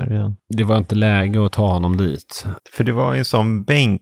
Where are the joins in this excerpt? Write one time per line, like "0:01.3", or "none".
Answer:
0:02.6